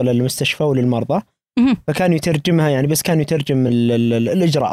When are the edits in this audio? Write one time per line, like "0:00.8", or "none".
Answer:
none